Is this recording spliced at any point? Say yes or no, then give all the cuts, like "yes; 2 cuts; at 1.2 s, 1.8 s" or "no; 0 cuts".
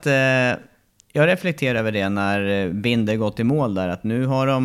no; 0 cuts